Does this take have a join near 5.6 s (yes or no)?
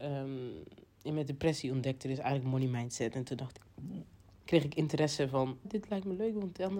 yes